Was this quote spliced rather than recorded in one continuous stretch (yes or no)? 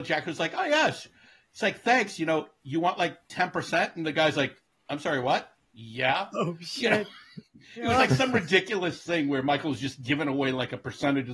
no